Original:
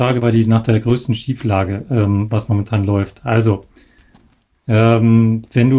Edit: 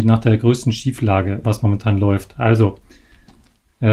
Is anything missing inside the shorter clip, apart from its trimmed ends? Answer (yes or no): yes